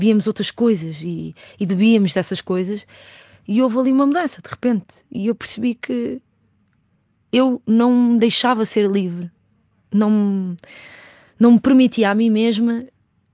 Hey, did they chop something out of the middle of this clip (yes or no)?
no